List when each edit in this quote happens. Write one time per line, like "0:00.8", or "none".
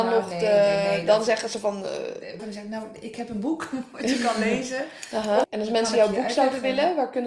0:02.4
0:05.4